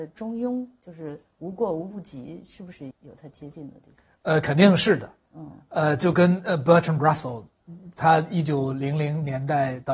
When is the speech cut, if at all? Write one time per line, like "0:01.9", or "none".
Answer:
0:02.9